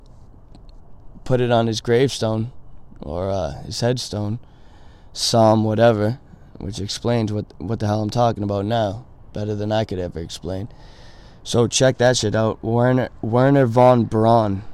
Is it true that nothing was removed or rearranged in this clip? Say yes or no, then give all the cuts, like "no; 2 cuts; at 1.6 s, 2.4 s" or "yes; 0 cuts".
yes; 0 cuts